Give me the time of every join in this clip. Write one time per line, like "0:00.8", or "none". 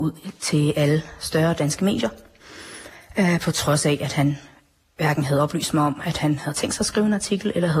none